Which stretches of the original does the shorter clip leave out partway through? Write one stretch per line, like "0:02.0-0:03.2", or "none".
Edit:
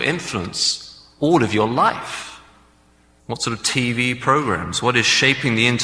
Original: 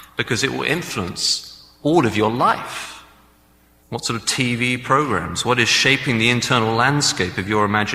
none